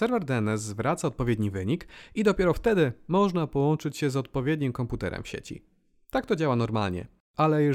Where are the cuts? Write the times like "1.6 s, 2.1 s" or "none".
none